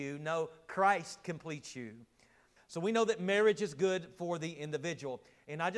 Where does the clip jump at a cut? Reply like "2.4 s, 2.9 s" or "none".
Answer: 2.6 s